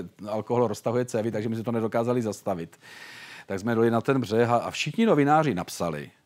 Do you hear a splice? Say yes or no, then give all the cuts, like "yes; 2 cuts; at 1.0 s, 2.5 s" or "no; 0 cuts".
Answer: no; 0 cuts